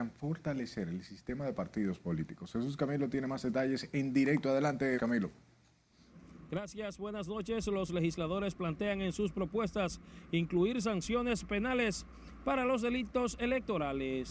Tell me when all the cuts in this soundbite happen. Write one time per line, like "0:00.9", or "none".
0:05.0